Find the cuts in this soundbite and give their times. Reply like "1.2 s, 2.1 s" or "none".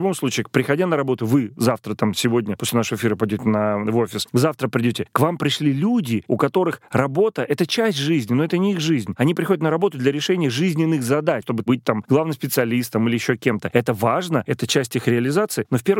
11.4 s